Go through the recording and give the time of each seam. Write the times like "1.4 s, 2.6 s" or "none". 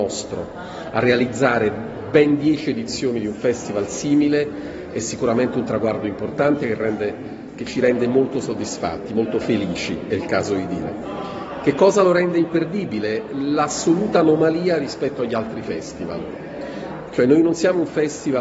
none